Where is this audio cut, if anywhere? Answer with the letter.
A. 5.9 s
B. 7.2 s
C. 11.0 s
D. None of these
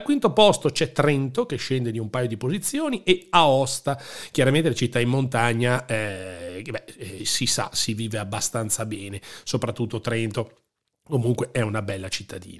B